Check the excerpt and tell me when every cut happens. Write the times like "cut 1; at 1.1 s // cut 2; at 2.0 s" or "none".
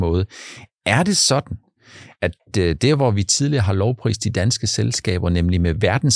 none